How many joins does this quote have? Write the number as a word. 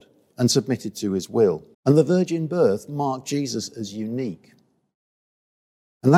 one